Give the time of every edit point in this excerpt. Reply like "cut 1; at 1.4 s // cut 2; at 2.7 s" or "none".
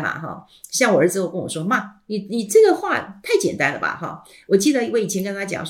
none